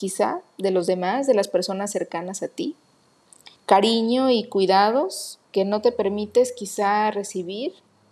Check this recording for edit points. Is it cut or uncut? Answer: cut